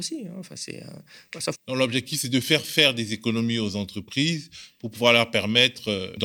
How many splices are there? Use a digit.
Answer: 1